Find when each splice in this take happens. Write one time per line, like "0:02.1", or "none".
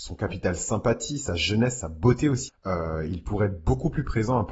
0:02.5